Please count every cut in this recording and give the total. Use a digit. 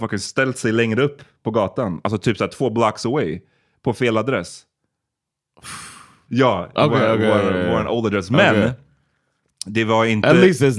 1